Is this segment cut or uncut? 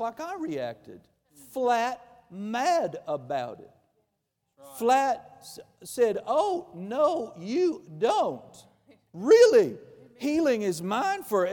uncut